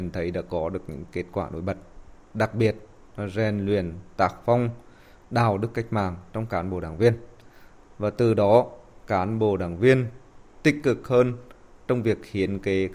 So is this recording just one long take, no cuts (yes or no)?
yes